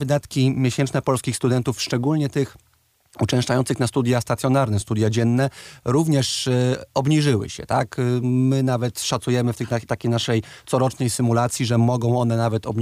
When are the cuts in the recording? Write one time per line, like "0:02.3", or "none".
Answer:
none